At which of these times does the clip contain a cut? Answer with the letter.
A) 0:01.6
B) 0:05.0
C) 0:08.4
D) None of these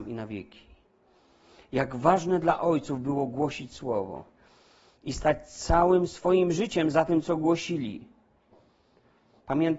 D